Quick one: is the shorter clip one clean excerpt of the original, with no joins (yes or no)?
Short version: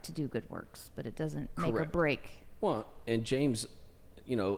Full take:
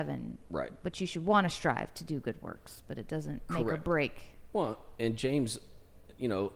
yes